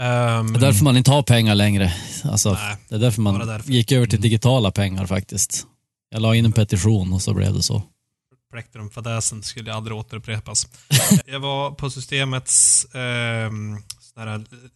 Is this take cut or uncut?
cut